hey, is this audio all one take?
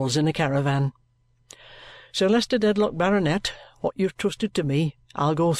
yes; 0 cuts

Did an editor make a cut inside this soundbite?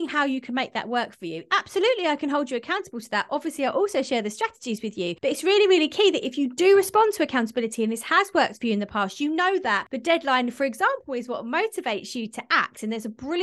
yes; 1 cut; at 1.5 s

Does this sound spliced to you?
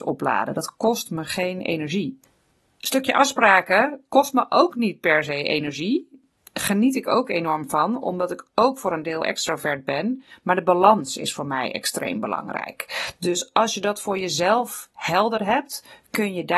no; 0 cuts

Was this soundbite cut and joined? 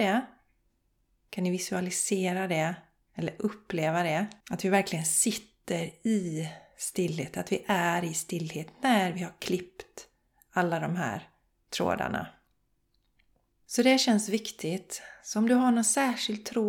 yes; 1 cut; at 4.4 s

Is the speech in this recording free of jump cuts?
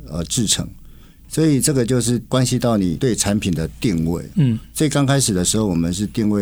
yes; 0 cuts

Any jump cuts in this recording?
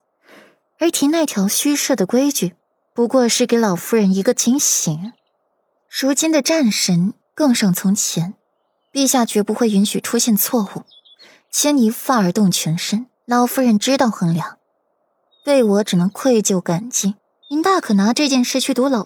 yes; 2 cuts; at 13.2 s, 17.4 s

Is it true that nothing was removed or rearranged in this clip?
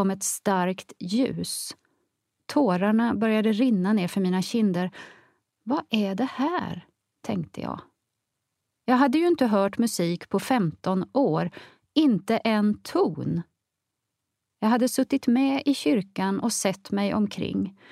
no; 1 cut; at 2.4 s

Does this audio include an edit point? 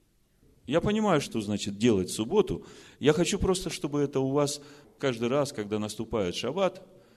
yes; 1 cut; at 1.2 s

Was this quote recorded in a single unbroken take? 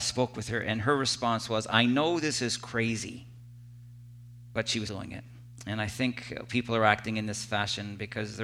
no; 1 cut; at 4.9 s

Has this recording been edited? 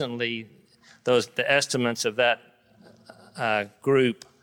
no; 0 cuts

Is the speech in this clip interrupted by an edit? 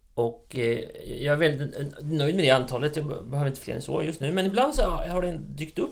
no; 0 cuts

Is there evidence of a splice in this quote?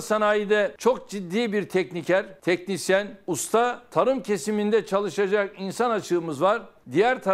no; 0 cuts

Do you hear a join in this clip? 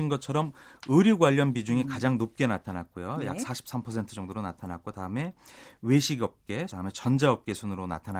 yes; 1 cut; at 6.7 s

